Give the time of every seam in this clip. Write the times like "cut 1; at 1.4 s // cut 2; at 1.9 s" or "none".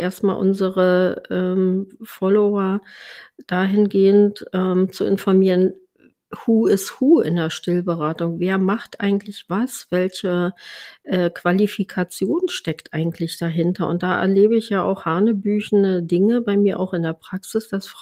none